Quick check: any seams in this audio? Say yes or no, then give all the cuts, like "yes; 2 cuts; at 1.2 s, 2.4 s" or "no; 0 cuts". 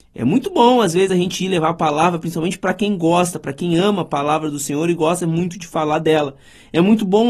no; 0 cuts